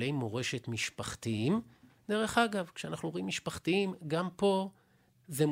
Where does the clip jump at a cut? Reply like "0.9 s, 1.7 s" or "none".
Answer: none